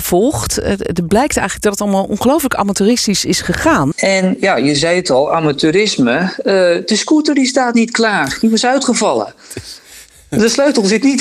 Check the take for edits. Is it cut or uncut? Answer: cut